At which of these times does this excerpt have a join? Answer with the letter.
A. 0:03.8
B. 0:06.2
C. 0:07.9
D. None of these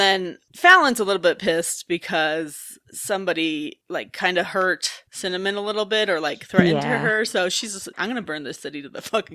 C